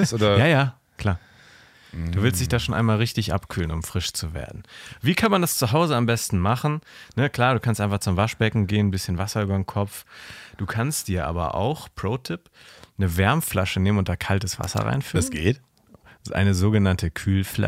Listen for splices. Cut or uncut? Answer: uncut